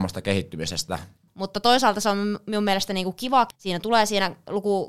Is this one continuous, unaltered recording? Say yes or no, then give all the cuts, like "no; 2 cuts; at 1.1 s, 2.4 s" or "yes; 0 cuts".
no; 2 cuts; at 1.3 s, 3.5 s